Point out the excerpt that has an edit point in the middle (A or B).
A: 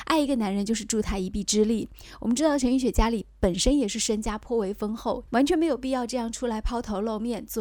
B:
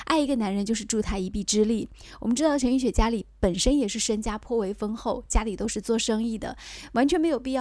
A